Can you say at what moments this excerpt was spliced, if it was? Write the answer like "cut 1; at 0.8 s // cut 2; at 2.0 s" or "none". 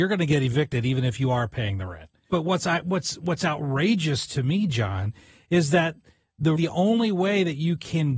cut 1; at 2.3 s // cut 2; at 6.6 s